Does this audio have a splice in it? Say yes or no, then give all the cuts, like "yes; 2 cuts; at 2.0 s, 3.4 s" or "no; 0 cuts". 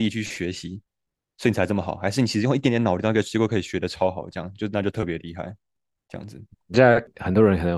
no; 0 cuts